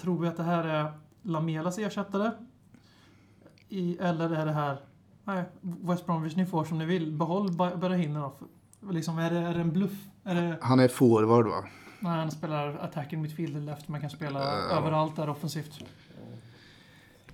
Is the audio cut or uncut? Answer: uncut